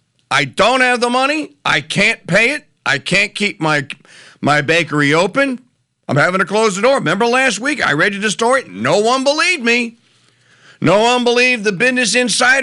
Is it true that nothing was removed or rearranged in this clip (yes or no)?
yes